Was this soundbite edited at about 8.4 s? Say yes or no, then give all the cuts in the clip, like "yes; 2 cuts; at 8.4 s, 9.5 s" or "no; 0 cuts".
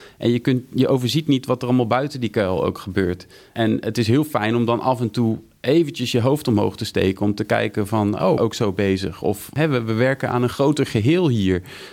yes; 1 cut; at 8.4 s